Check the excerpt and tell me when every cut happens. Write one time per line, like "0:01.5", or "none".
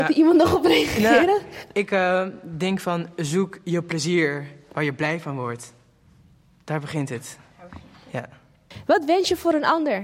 none